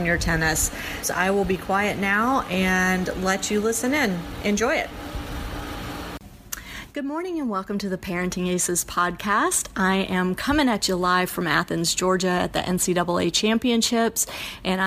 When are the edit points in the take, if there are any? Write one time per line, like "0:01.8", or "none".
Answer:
0:01.0